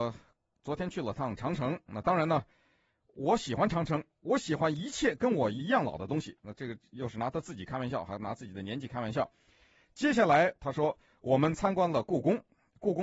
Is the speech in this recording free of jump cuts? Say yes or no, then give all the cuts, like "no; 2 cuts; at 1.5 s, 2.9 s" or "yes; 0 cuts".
yes; 0 cuts